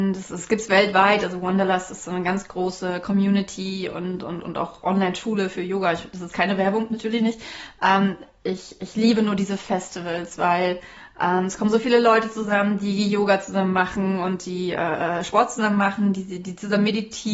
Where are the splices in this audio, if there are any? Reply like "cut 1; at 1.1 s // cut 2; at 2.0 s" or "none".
cut 1; at 4.4 s